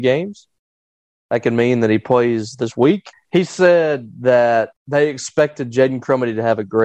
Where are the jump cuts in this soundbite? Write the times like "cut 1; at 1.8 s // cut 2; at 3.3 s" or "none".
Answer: cut 1; at 3.1 s // cut 2; at 4.8 s